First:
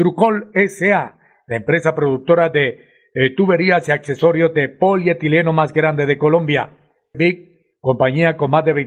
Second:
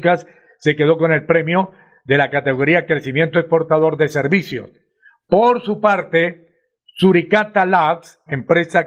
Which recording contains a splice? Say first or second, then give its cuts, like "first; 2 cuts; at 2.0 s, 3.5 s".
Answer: first; 1 cut; at 7.1 s